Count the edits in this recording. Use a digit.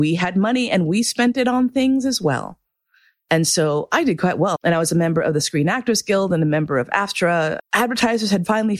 2